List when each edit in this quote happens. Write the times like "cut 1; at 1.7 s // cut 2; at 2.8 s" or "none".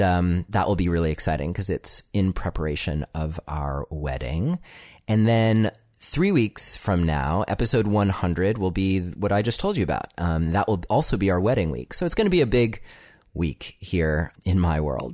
none